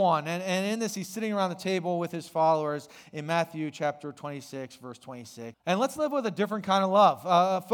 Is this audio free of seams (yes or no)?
no